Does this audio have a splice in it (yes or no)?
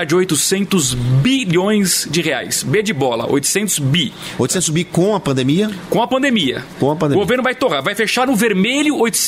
no